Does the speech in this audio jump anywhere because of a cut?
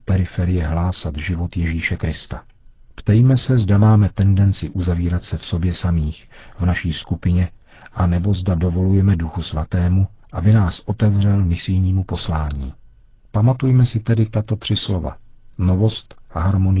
no; 0 cuts

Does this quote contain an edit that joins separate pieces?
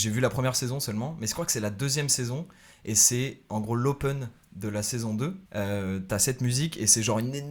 yes; 1 cut; at 5.5 s

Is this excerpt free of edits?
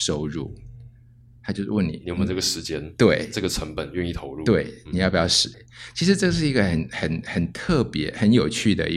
no; 1 cut; at 5.5 s

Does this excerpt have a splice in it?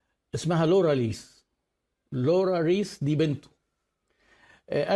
no; 0 cuts

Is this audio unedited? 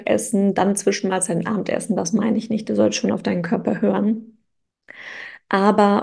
yes; 0 cuts

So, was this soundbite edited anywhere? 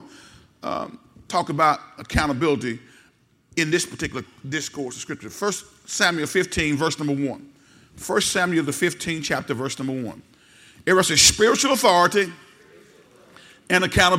no; 0 cuts

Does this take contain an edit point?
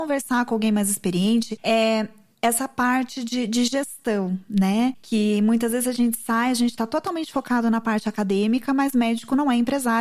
no; 0 cuts

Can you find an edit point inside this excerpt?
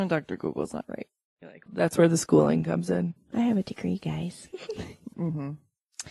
yes; 3 cuts; at 1.7 s, 3.2 s, 5.1 s

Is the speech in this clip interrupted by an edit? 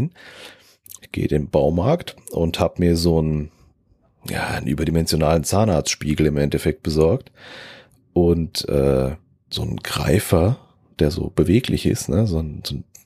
yes; 2 cuts; at 1.0 s, 9.5 s

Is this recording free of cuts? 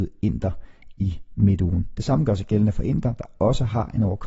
yes; 0 cuts

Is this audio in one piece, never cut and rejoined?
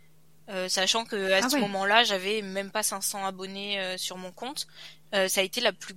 yes; 0 cuts

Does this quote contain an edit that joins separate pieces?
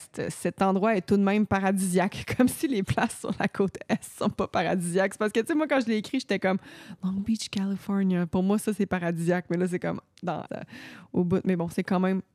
yes; 1 cut; at 10.5 s

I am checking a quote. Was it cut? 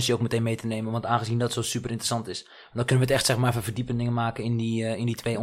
no; 0 cuts

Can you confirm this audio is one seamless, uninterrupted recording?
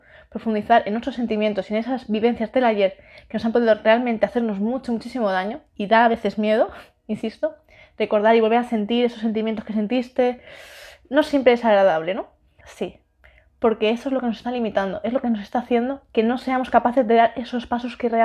no; 1 cut; at 12.6 s

